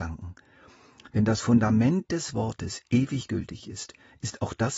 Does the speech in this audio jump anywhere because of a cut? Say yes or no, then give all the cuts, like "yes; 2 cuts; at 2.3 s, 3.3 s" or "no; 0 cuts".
no; 0 cuts